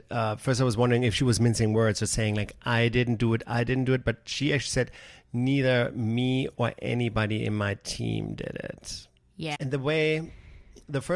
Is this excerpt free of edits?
no; 1 cut; at 9.5 s

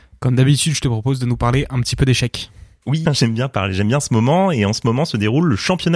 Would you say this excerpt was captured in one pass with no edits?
no; 1 cut; at 3.1 s

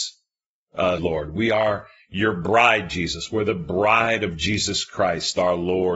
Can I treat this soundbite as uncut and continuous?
no; 1 cut; at 1.0 s

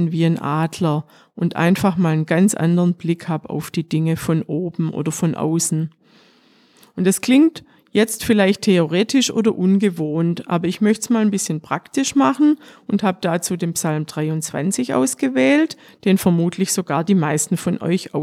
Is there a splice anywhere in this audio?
no; 0 cuts

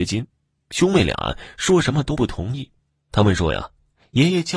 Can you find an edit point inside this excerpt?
no; 0 cuts

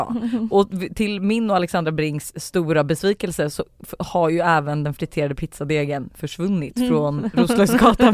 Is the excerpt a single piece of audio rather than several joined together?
yes; 0 cuts

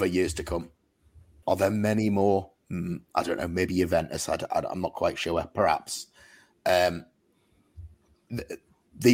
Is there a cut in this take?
yes; 1 cut; at 1.4 s

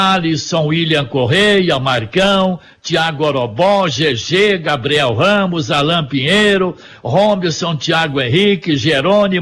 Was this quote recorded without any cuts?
yes; 0 cuts

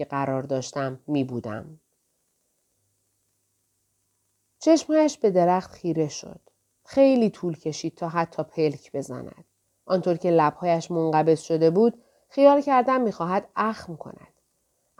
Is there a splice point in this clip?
yes; 1 cut; at 9.8 s

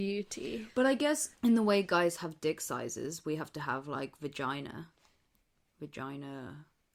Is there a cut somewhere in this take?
yes; 1 cut; at 1.3 s

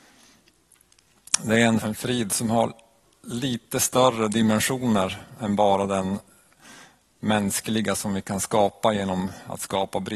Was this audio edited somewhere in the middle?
yes; 1 cut; at 1.8 s

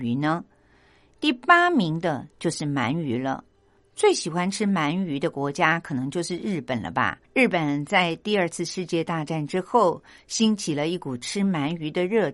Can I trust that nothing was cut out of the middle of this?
no; 1 cut; at 7.2 s

